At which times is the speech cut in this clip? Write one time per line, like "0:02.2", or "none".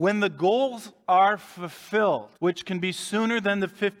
0:01.0
0:02.4